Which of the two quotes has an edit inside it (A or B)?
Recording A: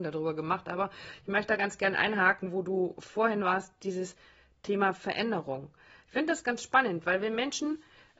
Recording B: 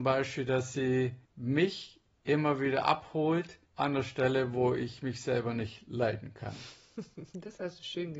B